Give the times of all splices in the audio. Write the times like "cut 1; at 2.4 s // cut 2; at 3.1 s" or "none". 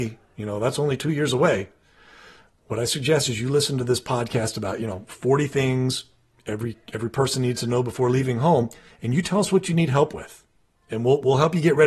none